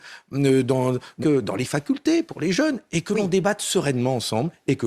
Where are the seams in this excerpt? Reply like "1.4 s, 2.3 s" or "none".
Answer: 1.2 s